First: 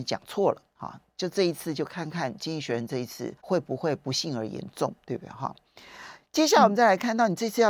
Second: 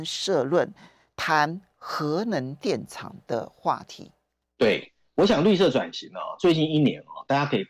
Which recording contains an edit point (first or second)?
first